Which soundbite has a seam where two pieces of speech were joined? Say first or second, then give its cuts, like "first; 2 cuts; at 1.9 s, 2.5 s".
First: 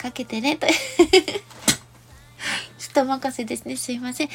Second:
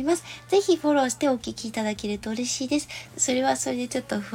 second; 1 cut; at 3.1 s